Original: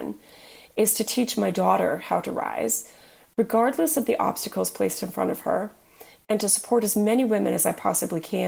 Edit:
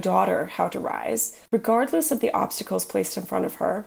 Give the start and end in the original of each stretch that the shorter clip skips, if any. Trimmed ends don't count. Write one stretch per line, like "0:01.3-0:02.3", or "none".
0:03.0-0:03.3